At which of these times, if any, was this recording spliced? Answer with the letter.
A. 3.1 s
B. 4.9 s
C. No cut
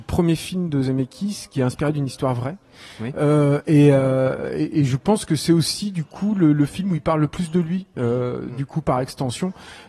C